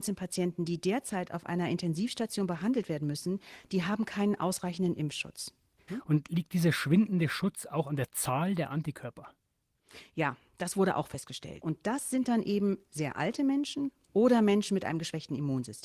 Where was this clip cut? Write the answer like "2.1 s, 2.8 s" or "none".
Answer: 5.9 s, 11.6 s